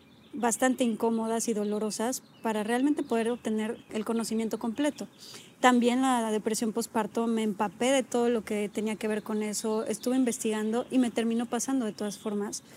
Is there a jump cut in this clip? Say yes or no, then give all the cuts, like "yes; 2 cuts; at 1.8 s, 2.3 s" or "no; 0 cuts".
no; 0 cuts